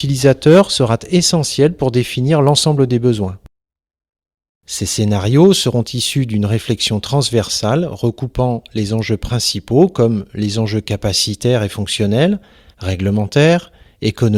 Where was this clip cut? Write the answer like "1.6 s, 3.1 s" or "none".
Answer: 4.5 s, 12.7 s